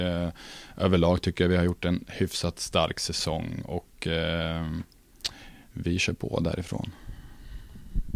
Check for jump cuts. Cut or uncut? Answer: uncut